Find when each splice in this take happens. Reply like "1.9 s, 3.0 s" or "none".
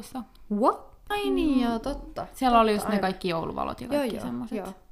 1.1 s